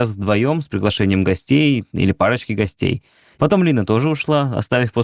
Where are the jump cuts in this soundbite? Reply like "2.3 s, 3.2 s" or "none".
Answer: 3.3 s